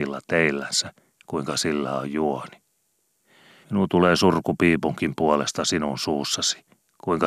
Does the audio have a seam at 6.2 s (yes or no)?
no